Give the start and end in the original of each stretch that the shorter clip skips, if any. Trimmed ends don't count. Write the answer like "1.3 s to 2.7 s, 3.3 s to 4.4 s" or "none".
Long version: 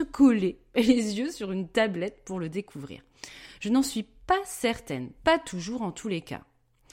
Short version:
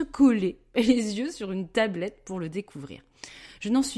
none